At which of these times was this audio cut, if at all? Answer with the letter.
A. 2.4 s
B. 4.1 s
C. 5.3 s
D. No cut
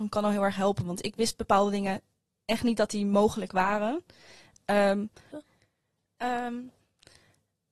C